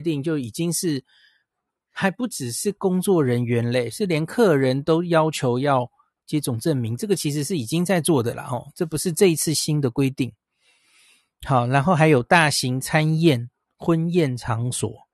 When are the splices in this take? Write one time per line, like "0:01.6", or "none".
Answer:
none